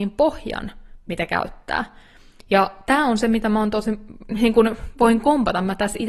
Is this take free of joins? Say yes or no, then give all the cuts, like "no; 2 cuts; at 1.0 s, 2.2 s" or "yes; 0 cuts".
yes; 0 cuts